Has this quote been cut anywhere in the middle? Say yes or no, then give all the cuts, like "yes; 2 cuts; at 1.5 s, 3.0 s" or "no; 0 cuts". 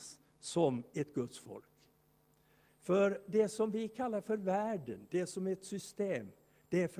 yes; 1 cut; at 2.7 s